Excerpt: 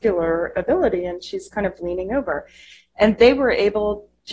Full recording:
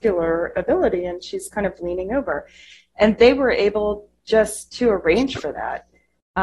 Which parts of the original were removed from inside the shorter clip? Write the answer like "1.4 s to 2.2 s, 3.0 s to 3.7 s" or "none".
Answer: none